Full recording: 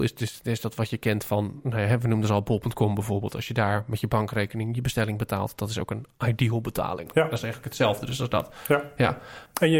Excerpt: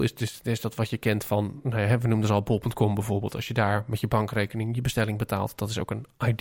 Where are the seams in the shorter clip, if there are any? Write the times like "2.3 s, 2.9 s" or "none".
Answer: none